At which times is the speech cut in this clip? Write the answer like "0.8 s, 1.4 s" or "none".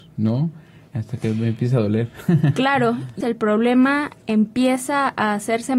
0.9 s, 3.2 s